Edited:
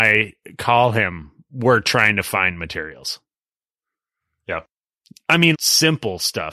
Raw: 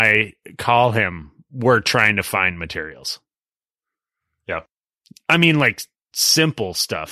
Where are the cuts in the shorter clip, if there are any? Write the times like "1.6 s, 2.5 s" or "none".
5.5 s